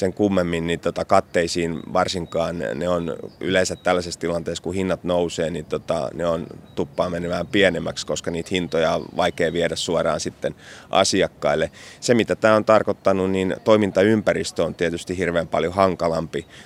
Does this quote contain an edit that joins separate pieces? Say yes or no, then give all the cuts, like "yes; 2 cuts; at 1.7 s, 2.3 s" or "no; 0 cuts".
no; 0 cuts